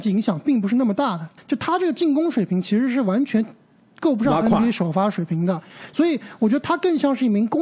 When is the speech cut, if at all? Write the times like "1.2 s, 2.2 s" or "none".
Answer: 1.4 s

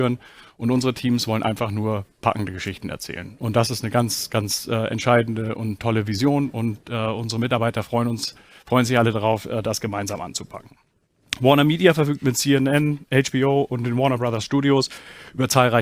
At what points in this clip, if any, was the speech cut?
none

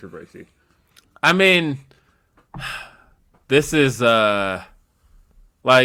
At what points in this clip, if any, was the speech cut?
none

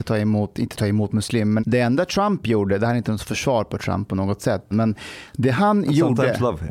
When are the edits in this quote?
1.6 s, 4.7 s

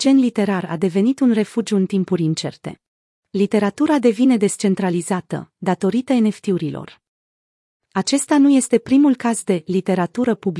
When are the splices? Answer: 3.2 s

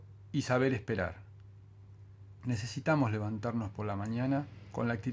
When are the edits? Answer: 2.4 s

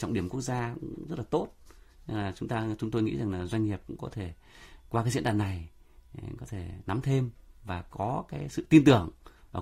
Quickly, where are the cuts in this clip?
none

